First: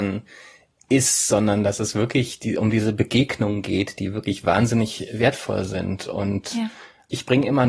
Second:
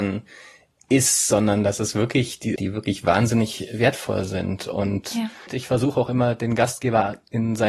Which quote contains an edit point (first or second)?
second